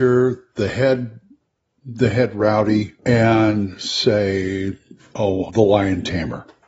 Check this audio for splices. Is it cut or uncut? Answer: cut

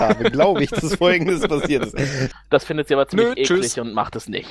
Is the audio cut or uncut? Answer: cut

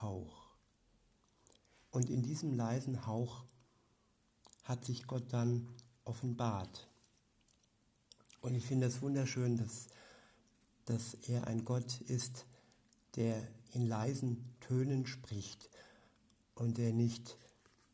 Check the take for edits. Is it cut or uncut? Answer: uncut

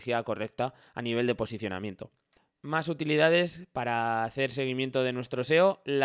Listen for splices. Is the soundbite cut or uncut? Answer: uncut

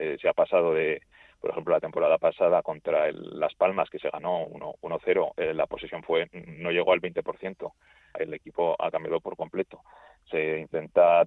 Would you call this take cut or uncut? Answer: cut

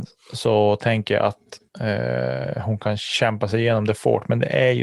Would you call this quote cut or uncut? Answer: uncut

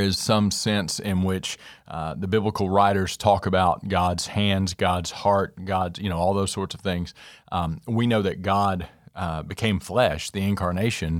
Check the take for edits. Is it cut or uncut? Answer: uncut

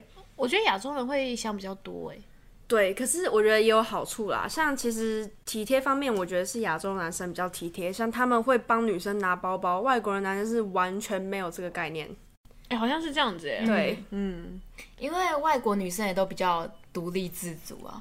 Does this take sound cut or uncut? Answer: uncut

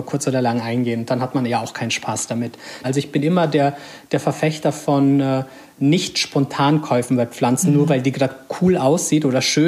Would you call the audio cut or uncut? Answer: cut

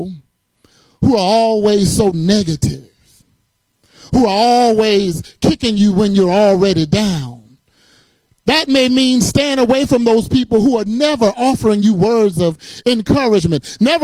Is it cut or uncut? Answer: uncut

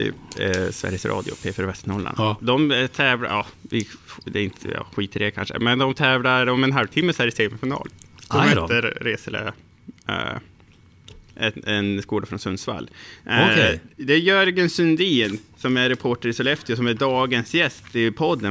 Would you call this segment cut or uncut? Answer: cut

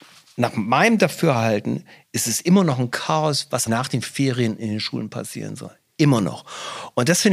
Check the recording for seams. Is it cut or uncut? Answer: cut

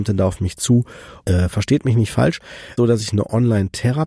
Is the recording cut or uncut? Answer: cut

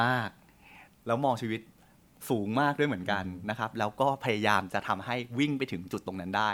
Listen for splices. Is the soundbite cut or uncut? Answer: uncut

